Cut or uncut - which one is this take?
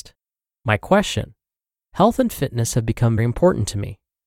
cut